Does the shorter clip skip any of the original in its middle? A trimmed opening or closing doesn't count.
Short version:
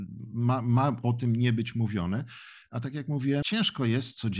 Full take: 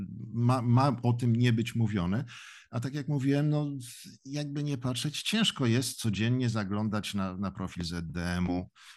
yes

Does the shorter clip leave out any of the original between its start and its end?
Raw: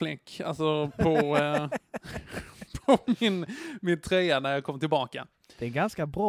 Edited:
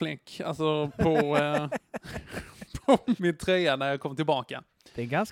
yes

